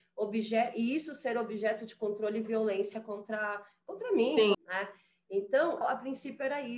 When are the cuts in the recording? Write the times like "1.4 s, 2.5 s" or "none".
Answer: 4.5 s, 5.8 s